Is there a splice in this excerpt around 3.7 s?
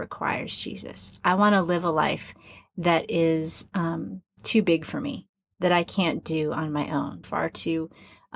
no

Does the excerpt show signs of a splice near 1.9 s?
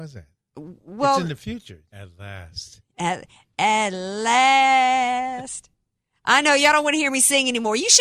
yes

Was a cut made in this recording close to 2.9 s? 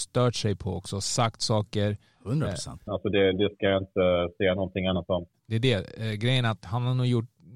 yes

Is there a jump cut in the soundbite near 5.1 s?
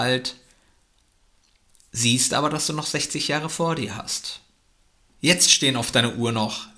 yes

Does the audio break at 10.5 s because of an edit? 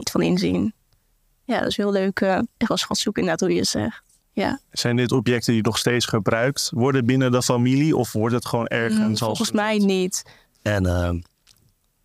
yes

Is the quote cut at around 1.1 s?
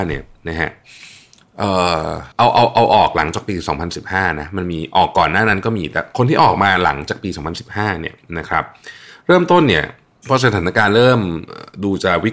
no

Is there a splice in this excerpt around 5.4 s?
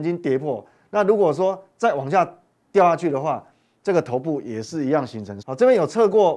yes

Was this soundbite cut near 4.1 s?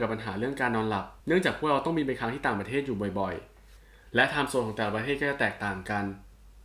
no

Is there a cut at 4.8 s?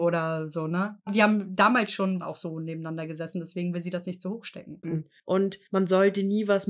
yes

